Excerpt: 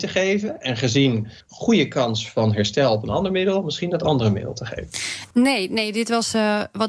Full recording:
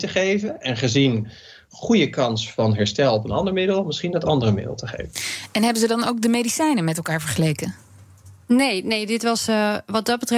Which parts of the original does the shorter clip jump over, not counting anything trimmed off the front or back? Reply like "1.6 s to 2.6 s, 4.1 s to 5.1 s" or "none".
1.4 s to 1.6 s, 5.5 s to 8.4 s